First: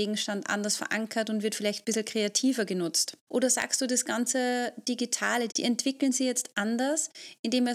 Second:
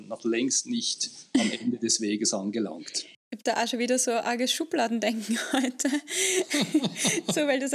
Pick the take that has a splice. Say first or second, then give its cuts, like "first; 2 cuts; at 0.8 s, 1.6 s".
first; 2 cuts; at 3.3 s, 5.5 s